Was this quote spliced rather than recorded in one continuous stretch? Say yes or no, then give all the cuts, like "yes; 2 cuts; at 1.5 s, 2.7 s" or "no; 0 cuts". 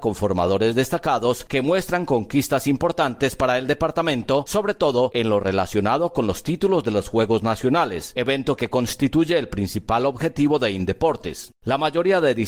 yes; 1 cut; at 11.5 s